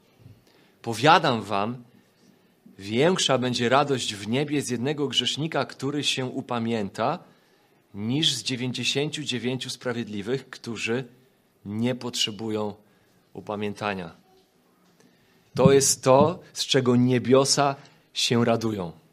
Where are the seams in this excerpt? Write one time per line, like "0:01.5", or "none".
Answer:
0:15.5

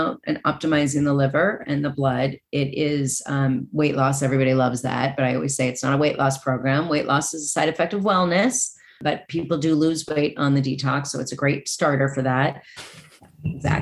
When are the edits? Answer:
0:12.8

